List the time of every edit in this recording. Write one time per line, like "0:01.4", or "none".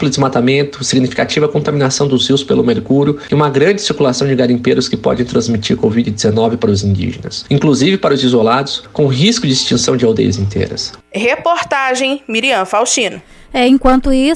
none